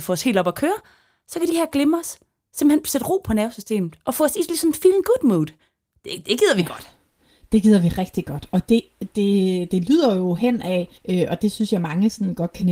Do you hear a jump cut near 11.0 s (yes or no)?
yes